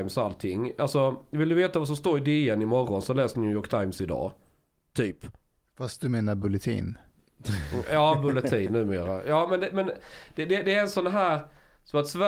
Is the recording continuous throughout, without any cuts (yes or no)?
yes